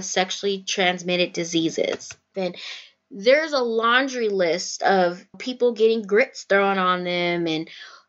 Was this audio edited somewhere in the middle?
yes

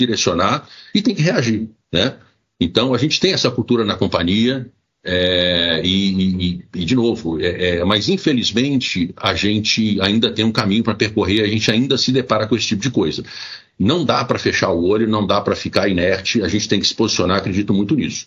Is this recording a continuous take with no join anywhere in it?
yes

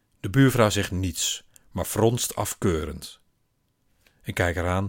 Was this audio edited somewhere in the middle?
no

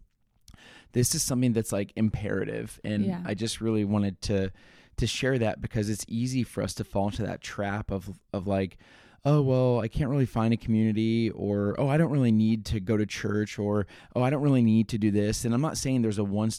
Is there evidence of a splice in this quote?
no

